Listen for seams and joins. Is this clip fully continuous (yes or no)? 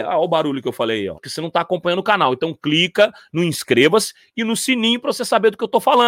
no